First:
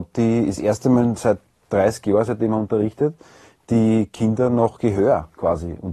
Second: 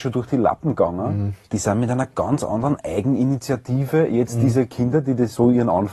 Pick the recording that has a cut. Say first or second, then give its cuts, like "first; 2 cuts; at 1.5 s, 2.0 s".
second; 1 cut; at 1.5 s